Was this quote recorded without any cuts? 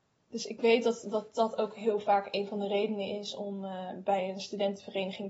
yes; 0 cuts

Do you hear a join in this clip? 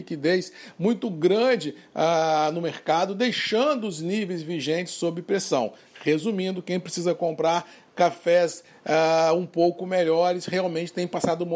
no; 0 cuts

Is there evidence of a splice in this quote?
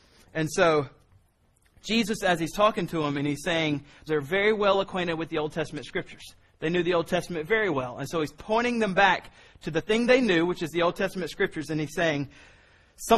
yes; 1 cut; at 4.1 s

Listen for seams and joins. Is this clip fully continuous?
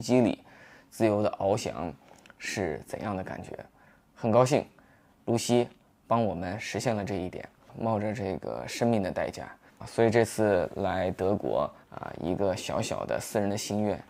no; 2 cuts; at 9.7 s, 11.8 s

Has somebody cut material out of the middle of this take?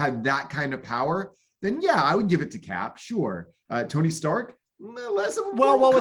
yes; 1 cut; at 3.6 s

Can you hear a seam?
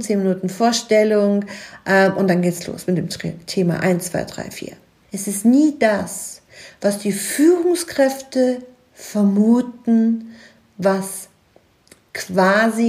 yes; 1 cut; at 5.0 s

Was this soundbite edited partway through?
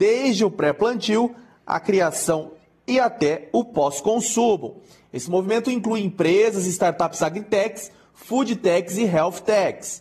no; 0 cuts

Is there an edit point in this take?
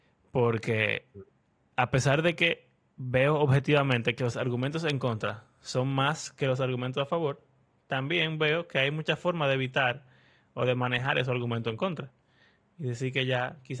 no; 0 cuts

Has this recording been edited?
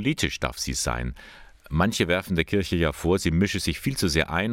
no; 0 cuts

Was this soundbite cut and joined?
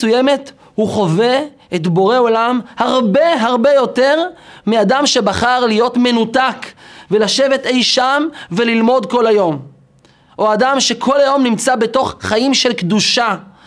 no; 0 cuts

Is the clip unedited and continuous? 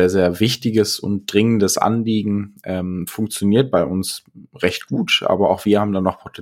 yes; 0 cuts

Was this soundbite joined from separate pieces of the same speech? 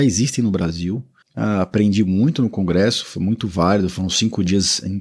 yes; 1 cut; at 1.2 s

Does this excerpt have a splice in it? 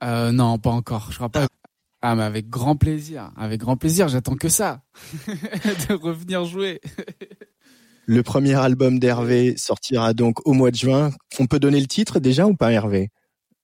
yes; 1 cut; at 1.5 s

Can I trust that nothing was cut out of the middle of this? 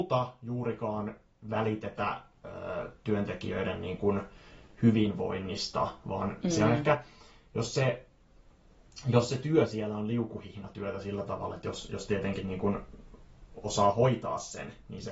yes; 0 cuts

